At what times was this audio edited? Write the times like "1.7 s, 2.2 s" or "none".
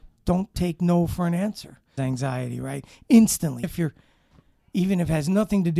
2.0 s, 3.6 s